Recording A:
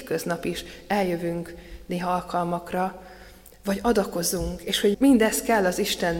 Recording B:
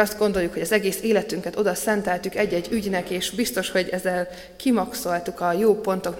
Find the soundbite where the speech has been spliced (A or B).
A